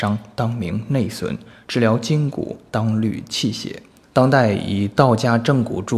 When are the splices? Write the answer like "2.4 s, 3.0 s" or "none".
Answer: 4.0 s